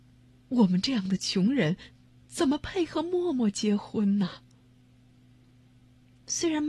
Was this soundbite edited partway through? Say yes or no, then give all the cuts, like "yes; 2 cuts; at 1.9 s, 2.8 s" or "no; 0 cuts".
no; 0 cuts